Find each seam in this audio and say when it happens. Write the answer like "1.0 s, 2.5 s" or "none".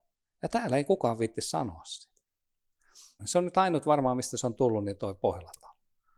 3.2 s